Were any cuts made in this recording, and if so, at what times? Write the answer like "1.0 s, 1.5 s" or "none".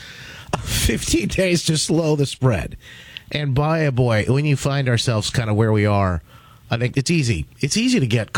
6.9 s

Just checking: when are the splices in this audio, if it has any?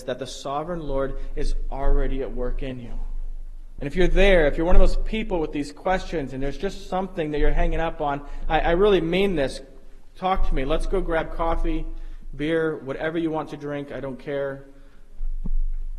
3.8 s

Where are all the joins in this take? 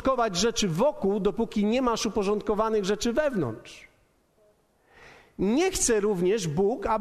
none

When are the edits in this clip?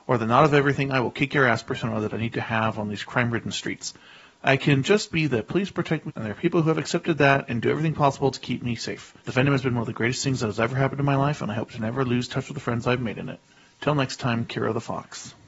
6.1 s, 9.2 s

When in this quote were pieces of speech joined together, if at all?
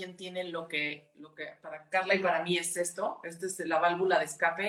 none

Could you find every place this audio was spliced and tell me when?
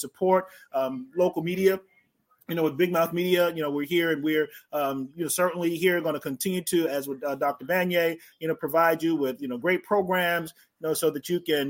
none

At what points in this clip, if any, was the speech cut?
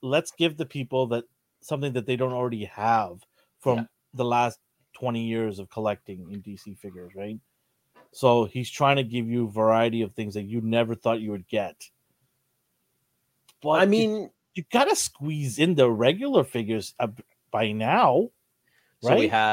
none

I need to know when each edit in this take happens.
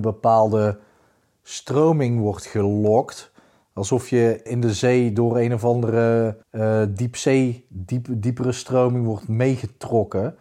4.5 s, 6.4 s

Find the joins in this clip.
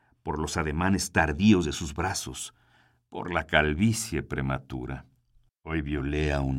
5.5 s

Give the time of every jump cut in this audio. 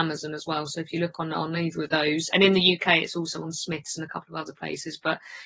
2.3 s

